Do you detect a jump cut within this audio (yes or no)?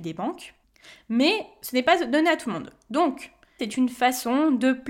yes